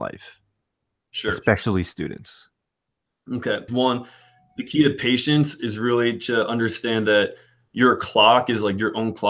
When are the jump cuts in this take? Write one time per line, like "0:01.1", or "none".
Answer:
0:03.7